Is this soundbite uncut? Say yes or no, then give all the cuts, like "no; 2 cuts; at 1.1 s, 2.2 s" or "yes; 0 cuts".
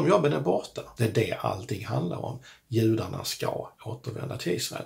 no; 1 cut; at 1.0 s